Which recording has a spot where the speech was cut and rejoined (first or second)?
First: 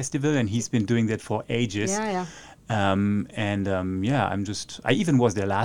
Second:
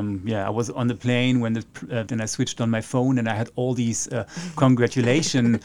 second